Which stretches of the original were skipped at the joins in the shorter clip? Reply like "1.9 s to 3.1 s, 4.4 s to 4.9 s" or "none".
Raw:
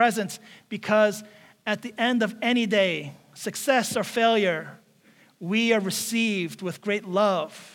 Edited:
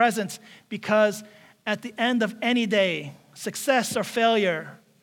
none